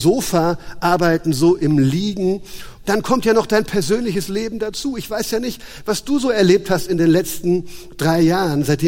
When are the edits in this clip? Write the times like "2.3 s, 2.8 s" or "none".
2.8 s

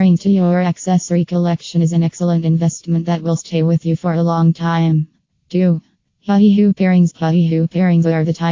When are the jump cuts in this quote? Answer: 7.1 s

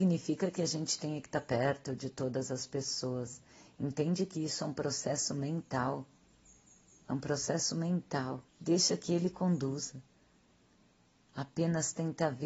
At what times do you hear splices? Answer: 8.5 s

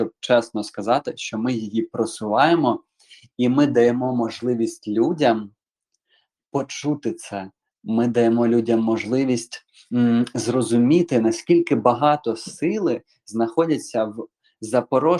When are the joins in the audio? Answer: none

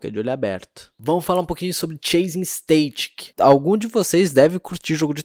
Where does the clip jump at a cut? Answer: none

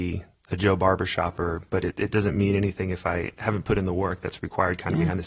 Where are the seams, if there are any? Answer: none

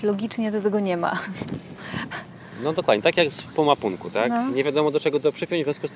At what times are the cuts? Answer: none

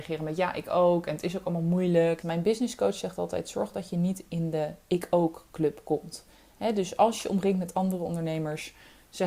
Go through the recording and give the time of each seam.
2.2 s

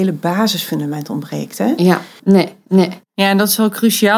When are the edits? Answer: 2.2 s

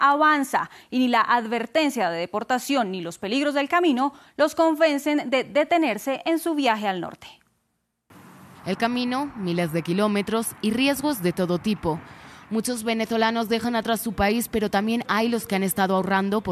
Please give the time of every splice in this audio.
8.5 s

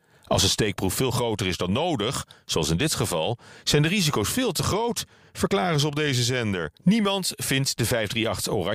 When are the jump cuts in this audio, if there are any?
6.8 s

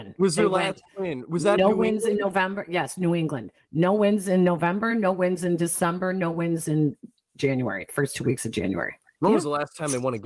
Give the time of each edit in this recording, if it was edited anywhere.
none

